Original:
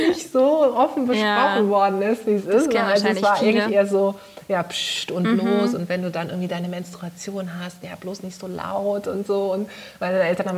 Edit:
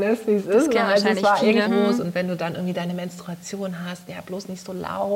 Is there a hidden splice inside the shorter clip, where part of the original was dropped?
yes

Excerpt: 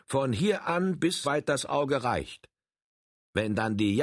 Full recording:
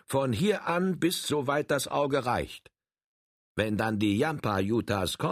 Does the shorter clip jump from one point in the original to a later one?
yes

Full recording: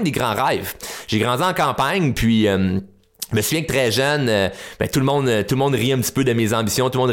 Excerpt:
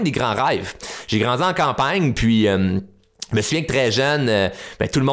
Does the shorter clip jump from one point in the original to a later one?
no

